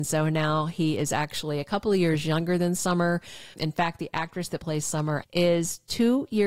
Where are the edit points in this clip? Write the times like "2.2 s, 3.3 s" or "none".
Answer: 3.5 s, 5.2 s